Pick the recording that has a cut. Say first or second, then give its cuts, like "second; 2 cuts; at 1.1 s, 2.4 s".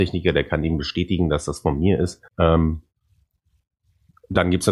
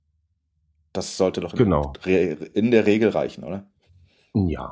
first; 1 cut; at 2.3 s